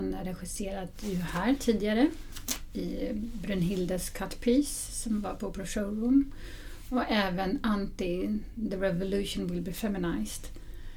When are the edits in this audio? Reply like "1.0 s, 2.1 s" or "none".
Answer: none